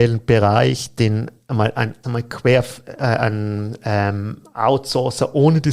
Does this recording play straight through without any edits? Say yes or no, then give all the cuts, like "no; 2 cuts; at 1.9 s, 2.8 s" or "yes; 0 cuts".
no; 1 cut; at 2.0 s